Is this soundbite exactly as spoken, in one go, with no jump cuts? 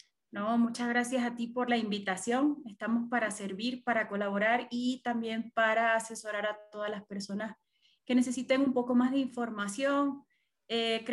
yes; 0 cuts

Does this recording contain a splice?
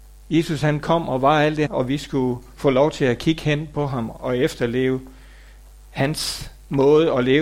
yes; 1 cut; at 1.7 s

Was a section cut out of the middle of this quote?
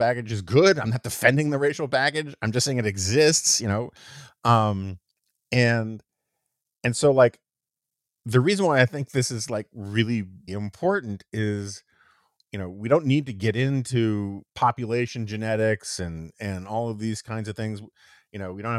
yes; 2 cuts; at 10.5 s, 14.5 s

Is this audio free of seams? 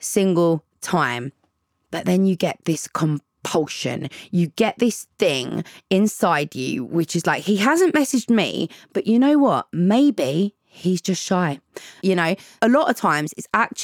no; 1 cut; at 12.0 s

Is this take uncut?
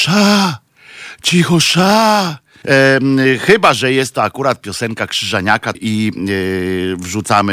no; 2 cuts; at 2.6 s, 5.7 s

